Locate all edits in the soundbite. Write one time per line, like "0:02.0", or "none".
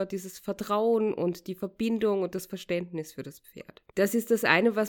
0:03.9